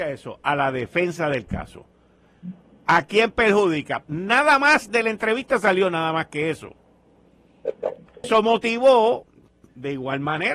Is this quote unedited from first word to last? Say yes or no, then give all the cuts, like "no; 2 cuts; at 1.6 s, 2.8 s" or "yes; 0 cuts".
no; 2 cuts; at 4.0 s, 8.2 s